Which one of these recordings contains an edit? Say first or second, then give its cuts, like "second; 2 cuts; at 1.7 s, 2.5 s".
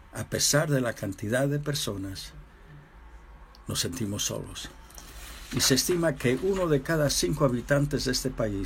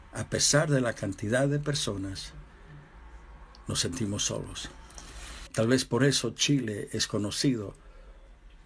second; 1 cut; at 5.5 s